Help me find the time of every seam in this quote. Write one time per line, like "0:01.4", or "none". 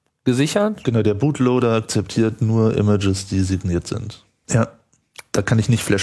0:04.4